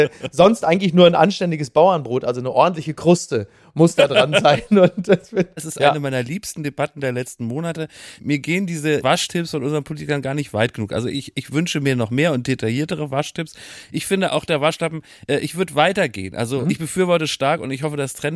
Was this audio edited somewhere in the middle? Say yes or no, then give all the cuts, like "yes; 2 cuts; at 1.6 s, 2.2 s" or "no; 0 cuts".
yes; 1 cut; at 5.6 s